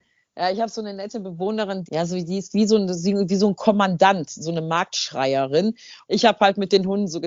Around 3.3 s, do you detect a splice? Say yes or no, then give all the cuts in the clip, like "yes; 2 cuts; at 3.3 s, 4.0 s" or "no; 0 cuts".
no; 2 cuts; at 1.9 s, 6.1 s